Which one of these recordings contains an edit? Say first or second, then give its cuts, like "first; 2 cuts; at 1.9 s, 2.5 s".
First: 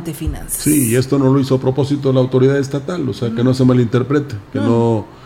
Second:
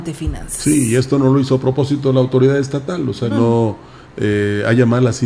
second; 1 cut; at 3.3 s